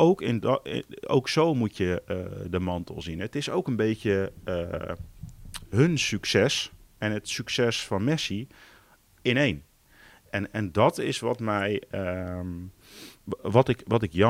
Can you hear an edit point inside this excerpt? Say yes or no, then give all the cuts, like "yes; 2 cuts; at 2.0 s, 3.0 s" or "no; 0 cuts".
no; 0 cuts